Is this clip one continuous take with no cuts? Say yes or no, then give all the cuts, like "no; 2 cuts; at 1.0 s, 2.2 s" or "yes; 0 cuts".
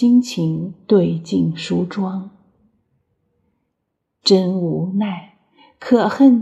yes; 0 cuts